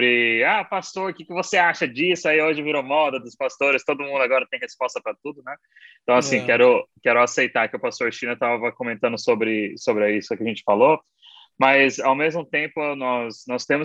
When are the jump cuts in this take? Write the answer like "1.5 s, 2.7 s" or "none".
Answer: none